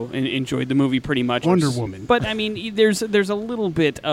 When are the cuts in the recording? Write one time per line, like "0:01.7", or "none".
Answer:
0:01.4